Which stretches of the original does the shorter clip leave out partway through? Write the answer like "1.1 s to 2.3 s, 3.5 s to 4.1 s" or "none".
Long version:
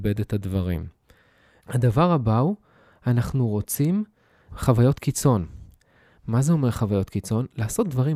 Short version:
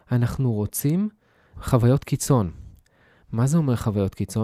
none